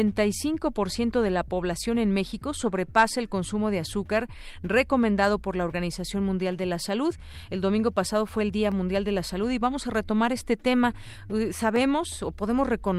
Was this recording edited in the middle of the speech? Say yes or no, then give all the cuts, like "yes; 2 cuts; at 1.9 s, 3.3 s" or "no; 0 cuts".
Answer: no; 0 cuts